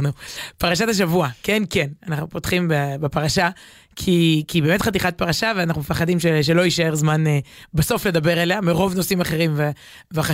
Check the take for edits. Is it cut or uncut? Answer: uncut